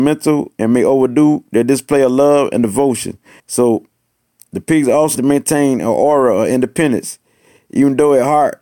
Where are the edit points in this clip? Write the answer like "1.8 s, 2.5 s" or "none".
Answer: 3.4 s, 5.2 s